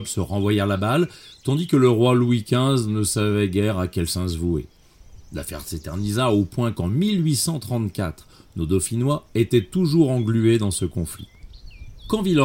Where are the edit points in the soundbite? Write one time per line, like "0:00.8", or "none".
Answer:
none